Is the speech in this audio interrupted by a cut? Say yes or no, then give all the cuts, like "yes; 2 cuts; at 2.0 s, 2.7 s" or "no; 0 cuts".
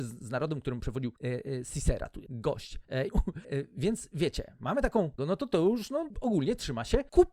yes; 2 cuts; at 3.1 s, 5.2 s